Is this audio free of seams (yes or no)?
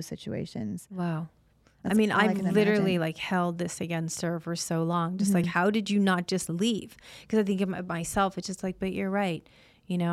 yes